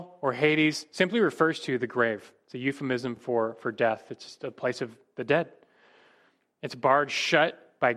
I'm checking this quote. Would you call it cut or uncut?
uncut